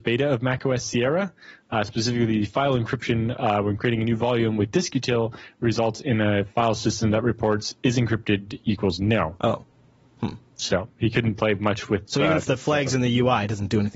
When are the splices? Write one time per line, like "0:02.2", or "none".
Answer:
none